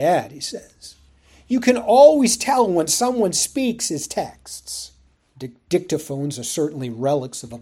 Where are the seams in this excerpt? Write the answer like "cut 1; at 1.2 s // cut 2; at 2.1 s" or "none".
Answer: cut 1; at 5.2 s

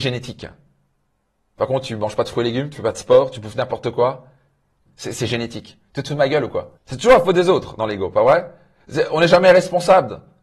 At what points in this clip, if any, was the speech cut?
cut 1; at 4.9 s // cut 2; at 6.8 s

